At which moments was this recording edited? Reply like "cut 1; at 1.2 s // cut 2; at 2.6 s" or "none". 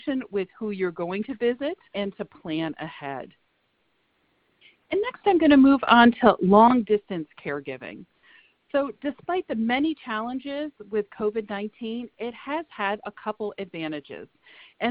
cut 1; at 1.9 s